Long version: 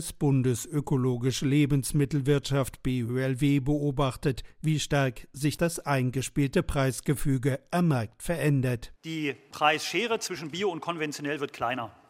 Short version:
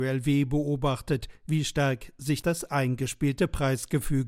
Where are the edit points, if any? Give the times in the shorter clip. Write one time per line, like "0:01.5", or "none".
none